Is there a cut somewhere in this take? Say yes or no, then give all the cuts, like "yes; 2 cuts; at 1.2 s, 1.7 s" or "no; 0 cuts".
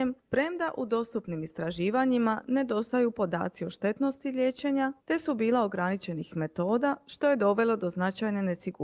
yes; 1 cut; at 5.0 s